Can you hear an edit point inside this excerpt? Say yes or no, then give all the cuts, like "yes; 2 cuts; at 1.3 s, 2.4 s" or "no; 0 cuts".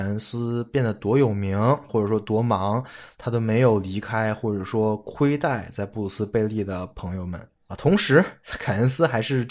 yes; 2 cuts; at 1.9 s, 7.7 s